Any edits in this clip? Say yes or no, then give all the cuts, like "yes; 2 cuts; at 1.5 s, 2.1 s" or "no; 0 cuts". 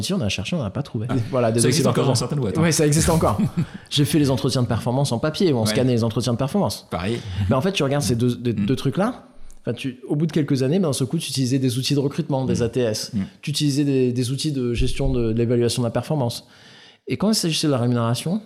yes; 1 cut; at 1.1 s